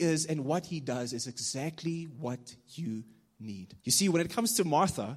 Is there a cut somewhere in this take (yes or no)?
yes